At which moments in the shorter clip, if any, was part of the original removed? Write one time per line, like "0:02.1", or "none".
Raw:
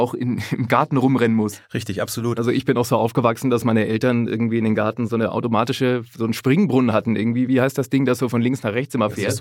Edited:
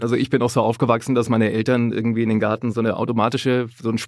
none